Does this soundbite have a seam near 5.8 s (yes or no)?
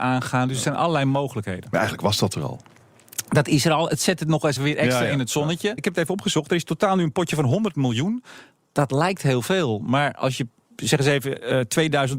yes